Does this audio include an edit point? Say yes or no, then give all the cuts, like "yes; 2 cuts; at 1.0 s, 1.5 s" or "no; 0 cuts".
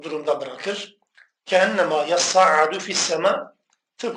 no; 0 cuts